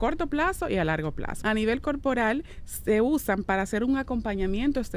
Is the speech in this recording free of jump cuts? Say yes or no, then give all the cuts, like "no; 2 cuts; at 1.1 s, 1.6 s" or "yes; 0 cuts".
no; 1 cut; at 1.4 s